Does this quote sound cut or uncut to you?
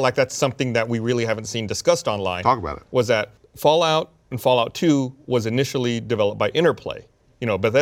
cut